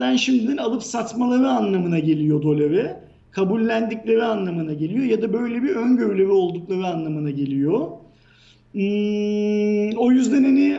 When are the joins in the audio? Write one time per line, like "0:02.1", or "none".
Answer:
none